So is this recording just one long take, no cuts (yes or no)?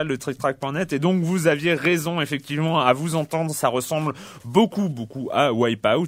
no